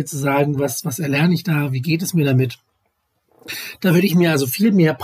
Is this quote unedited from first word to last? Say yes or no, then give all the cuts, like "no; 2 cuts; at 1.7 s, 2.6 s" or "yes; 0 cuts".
yes; 0 cuts